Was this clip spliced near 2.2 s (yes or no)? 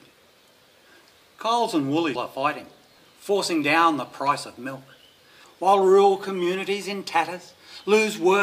yes